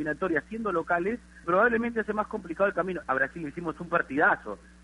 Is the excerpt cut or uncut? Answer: cut